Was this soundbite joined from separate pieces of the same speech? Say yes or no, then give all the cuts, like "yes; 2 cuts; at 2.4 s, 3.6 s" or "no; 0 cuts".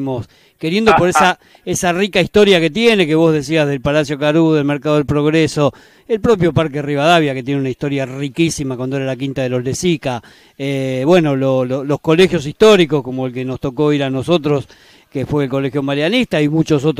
no; 0 cuts